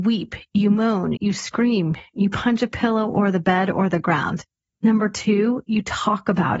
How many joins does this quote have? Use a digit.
2